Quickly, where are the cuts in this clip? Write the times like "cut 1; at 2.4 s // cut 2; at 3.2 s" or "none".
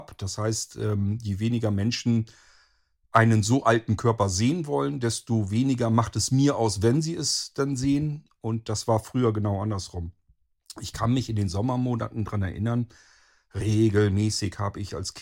none